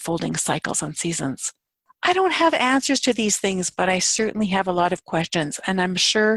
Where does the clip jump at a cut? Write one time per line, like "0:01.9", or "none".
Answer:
none